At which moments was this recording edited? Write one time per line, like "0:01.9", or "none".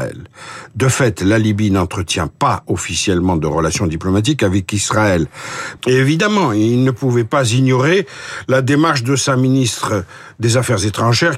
0:05.8

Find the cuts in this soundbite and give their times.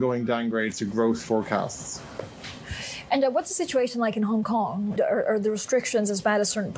0:05.0

